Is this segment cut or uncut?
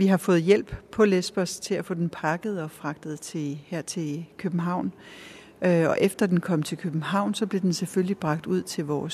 uncut